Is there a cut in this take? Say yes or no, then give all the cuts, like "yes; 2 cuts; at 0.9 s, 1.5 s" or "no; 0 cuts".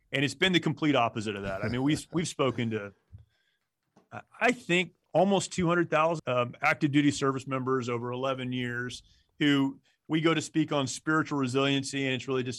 yes; 1 cut; at 6.2 s